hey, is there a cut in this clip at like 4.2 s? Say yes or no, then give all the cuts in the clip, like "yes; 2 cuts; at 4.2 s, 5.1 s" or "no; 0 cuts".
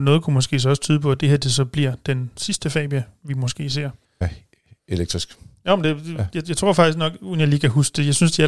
yes; 1 cut; at 4.2 s